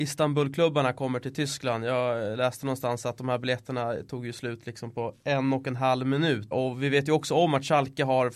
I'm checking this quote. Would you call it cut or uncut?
cut